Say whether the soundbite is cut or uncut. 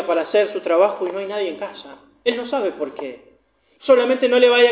cut